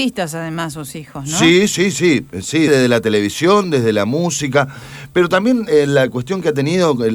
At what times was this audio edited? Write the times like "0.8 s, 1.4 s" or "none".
2.7 s